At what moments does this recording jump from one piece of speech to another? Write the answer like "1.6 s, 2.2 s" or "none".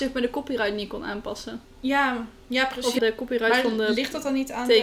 3.0 s

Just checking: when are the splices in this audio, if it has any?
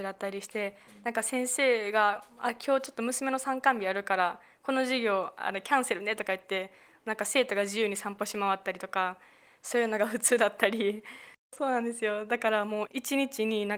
12.9 s

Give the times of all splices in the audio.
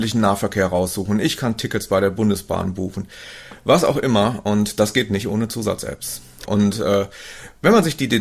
6.5 s

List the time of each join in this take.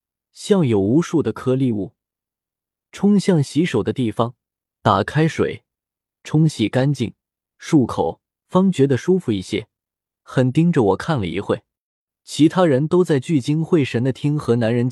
10.1 s

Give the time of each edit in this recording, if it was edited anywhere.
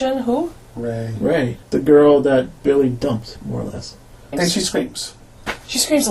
1.6 s, 4.3 s

